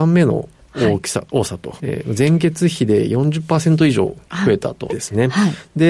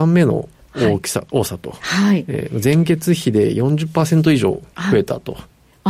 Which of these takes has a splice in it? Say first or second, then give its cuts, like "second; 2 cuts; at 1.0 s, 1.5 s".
first; 2 cuts; at 1.8 s, 4.9 s